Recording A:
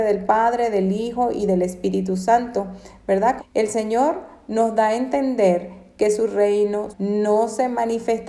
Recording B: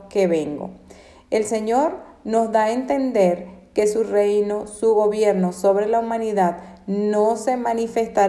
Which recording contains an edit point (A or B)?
A